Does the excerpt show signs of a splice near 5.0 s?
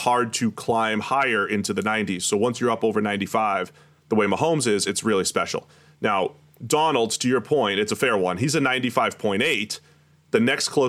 no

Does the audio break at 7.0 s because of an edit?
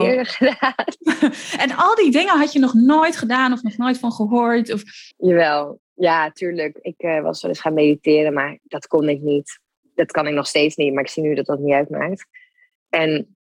no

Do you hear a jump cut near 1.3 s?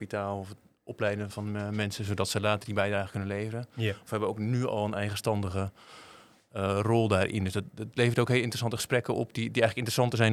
yes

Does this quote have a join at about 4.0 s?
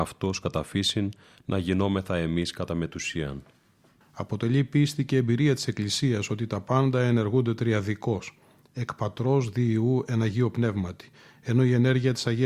yes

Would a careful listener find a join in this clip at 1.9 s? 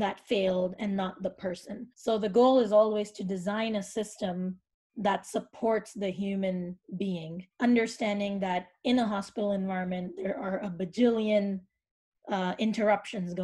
yes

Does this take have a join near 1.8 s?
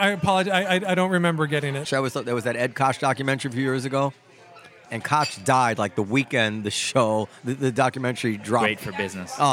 yes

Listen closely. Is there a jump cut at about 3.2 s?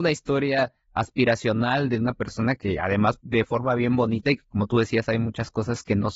yes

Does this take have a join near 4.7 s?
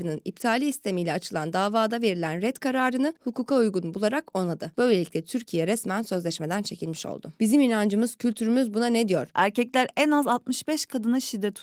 no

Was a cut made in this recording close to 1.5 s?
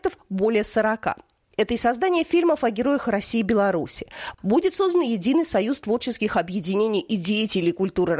no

